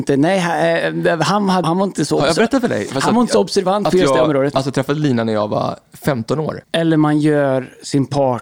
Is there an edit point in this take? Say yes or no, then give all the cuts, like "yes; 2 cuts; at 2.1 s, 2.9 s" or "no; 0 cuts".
yes; 2 cuts; at 1.6 s, 6.6 s